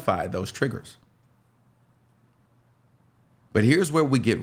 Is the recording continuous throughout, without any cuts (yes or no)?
yes